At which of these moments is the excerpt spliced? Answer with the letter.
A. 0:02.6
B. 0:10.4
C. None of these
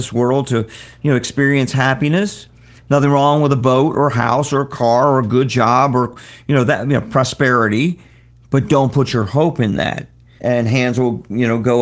B